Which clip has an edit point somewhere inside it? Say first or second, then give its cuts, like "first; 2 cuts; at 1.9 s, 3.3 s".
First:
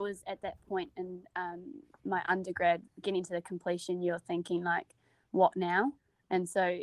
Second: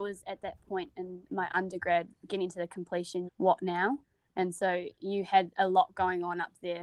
second; 2 cuts; at 1.2 s, 3.3 s